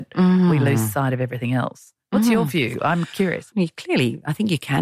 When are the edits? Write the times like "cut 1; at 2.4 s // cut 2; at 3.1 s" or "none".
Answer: cut 1; at 3.5 s